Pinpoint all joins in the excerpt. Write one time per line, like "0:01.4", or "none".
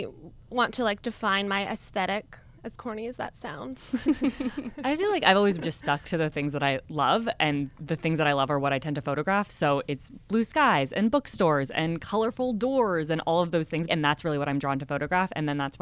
0:05.6
0:13.9